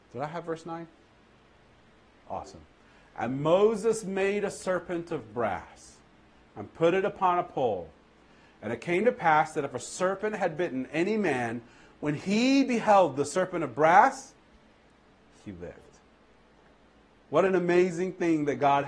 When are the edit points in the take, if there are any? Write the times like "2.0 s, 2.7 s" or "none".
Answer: none